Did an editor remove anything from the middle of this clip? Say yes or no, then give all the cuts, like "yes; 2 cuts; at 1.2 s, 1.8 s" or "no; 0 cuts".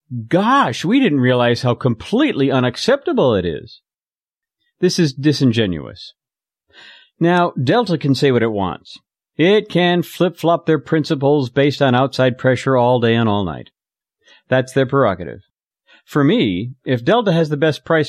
no; 0 cuts